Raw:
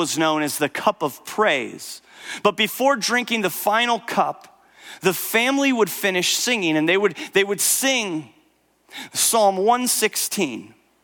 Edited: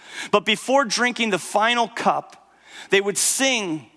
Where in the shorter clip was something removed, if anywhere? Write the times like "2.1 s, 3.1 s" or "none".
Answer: 2.9 s